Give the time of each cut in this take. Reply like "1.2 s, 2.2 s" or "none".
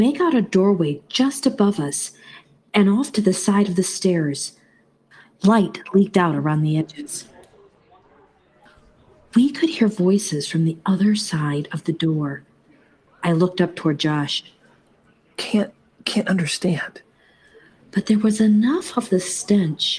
13.1 s